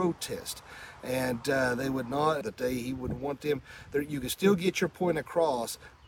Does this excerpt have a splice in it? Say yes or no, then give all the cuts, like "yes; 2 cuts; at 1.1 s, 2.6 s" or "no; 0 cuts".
yes; 1 cut; at 2.4 s